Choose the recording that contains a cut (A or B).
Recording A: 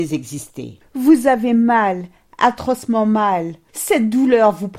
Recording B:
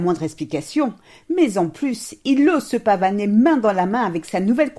A